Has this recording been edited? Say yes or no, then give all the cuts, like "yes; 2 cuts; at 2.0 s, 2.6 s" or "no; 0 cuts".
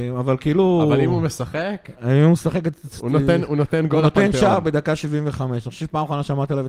no; 0 cuts